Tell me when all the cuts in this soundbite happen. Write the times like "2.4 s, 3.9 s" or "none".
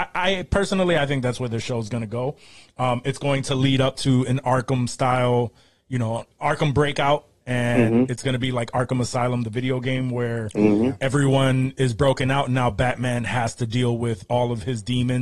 none